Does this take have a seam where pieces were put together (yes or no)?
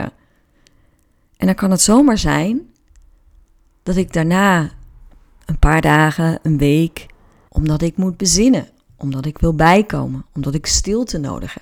yes